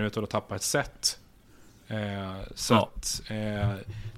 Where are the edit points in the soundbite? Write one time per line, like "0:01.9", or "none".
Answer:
none